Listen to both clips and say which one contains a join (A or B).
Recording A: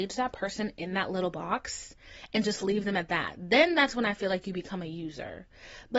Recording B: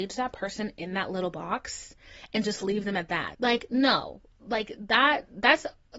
B